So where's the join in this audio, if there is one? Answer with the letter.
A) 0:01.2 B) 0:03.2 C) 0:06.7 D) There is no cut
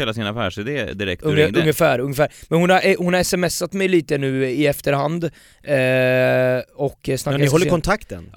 D